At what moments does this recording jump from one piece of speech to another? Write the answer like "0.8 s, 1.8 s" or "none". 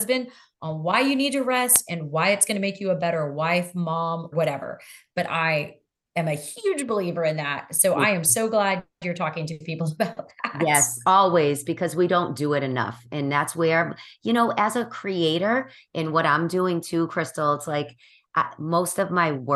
4.3 s